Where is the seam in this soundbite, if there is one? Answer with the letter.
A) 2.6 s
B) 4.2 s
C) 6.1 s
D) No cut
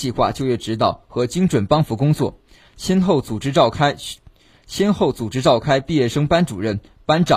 D